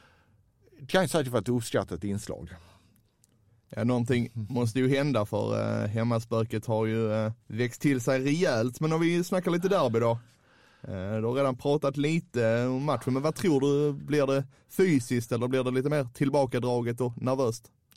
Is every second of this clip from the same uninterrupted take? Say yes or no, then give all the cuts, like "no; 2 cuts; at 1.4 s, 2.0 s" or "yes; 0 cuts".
no; 1 cut; at 7.4 s